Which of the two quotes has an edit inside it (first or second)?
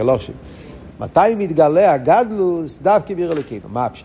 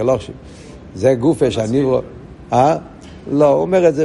first